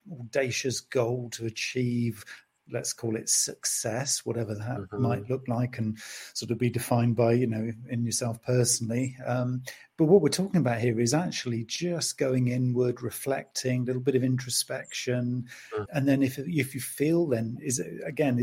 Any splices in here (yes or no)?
yes